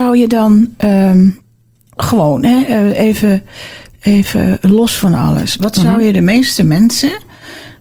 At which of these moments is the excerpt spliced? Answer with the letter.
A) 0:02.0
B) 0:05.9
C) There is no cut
A